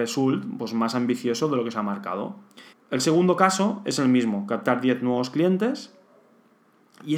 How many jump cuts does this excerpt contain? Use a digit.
1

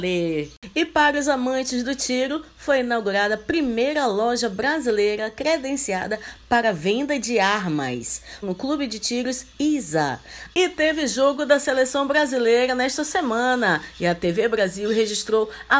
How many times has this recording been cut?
2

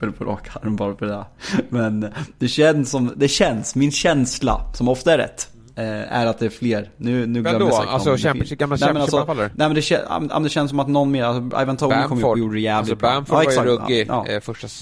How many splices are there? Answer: 0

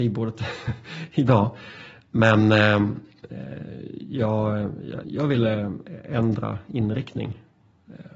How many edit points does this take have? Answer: 1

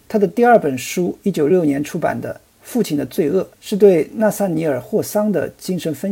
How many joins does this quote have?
2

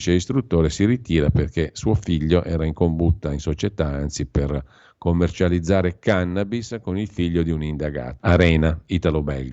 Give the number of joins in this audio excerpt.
1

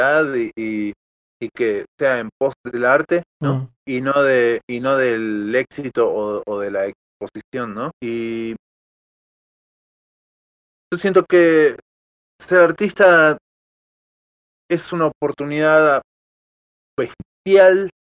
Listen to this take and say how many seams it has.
2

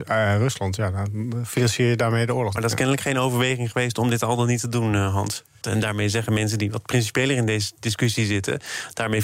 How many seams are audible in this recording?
2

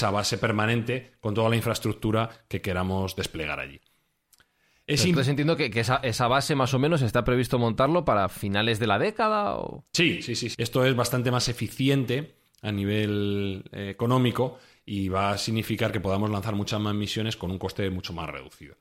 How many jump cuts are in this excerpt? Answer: 1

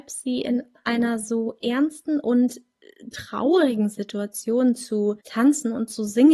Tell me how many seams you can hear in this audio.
1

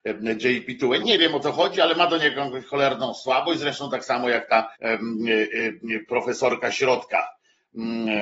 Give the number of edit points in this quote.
2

